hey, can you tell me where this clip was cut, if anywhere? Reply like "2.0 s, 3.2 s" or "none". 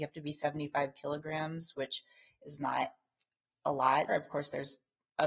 4.1 s

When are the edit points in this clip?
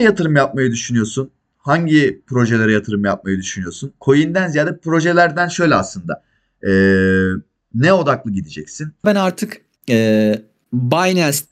9.0 s

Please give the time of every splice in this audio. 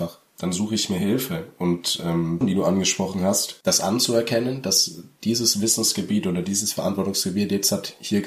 2.4 s

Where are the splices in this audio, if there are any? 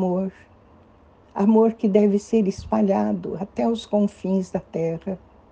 none

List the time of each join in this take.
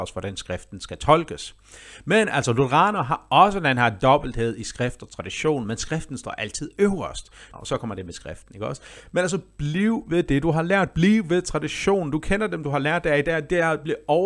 7.5 s

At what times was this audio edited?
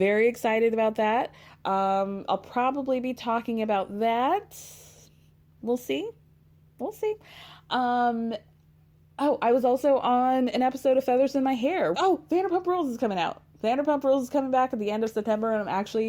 2.3 s, 11.9 s

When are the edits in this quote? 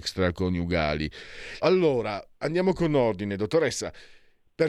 1.6 s

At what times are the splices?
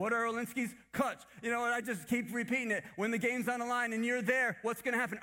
none

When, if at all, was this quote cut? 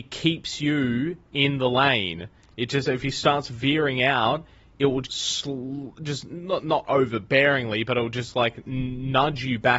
5.0 s

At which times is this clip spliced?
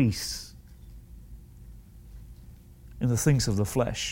none

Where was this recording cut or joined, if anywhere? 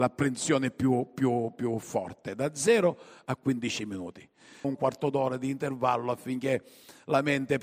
4.6 s

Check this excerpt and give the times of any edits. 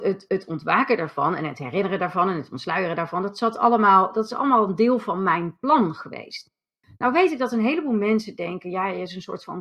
none

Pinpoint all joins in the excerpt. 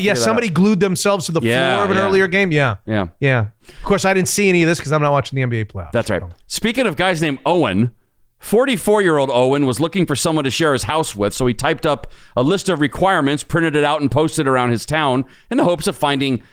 none

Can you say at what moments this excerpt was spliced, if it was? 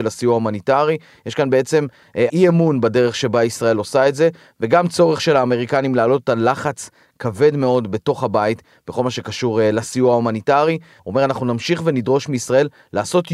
2.3 s, 11.0 s

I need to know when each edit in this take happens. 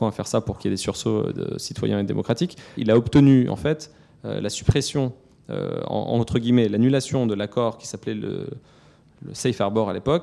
2.8 s

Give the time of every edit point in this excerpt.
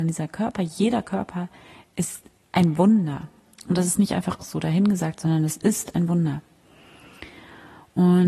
none

